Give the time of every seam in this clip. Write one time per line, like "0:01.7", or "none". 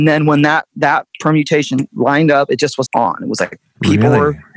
0:02.9

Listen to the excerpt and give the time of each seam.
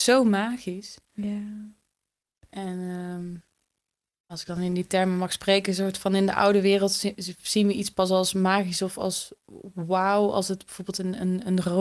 0:04.3

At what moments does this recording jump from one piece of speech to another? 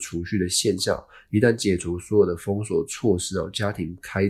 none

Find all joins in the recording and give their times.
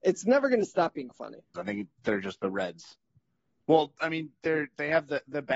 0:01.5

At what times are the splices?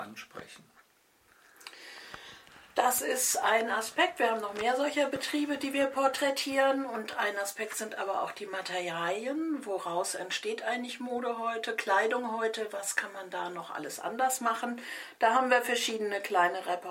none

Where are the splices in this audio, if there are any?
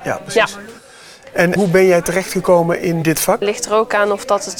0:01.6
0:03.4

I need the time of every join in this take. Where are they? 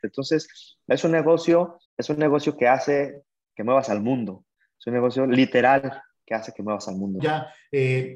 0:01.9
0:07.2

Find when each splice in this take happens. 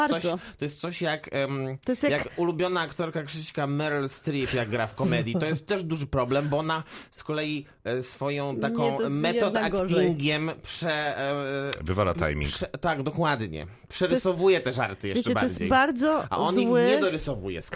none

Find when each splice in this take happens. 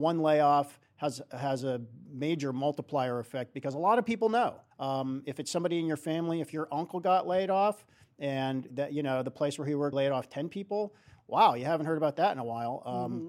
0:04.7
0:08.7
0:09.9

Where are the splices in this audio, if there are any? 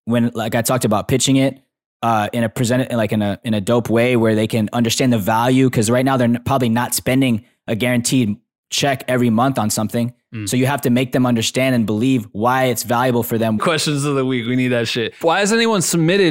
0:13.6
0:15.2

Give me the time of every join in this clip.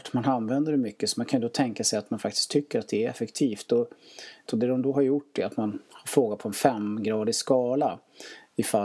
0:04.5

